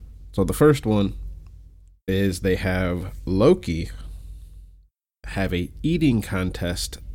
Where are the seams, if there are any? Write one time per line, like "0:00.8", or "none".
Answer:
none